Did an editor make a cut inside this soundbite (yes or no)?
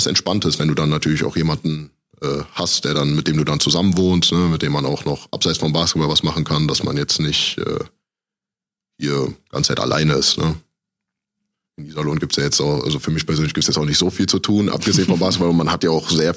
no